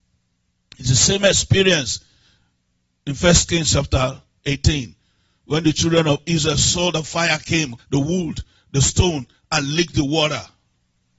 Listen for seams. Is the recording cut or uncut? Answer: cut